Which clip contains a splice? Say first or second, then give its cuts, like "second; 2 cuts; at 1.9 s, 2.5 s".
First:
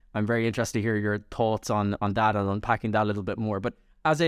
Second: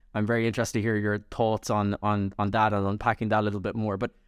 first; 1 cut; at 2.0 s